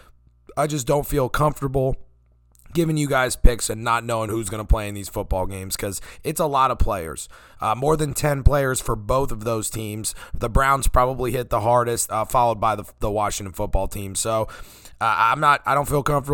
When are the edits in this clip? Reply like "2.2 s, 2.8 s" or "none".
12.1 s